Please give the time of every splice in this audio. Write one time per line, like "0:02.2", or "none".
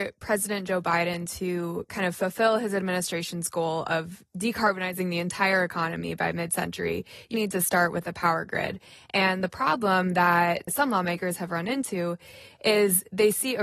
0:07.3